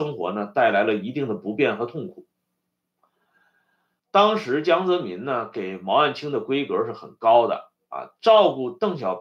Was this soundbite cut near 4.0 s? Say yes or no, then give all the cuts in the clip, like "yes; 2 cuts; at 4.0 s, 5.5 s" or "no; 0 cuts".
yes; 1 cut; at 4.0 s